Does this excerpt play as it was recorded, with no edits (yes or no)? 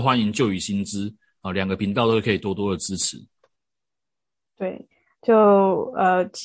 yes